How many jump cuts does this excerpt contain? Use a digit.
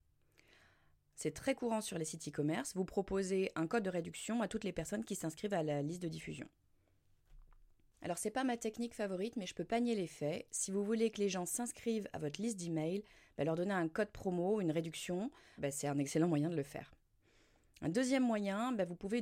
1